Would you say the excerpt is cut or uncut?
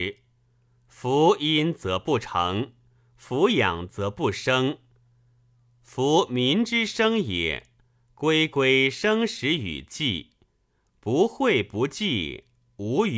uncut